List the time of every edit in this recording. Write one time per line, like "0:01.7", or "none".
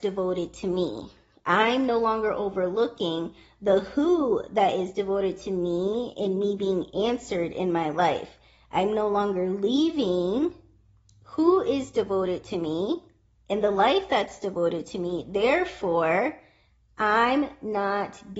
none